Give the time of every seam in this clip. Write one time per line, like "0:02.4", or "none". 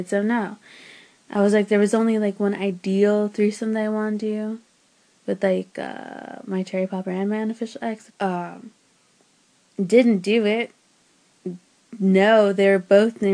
0:08.1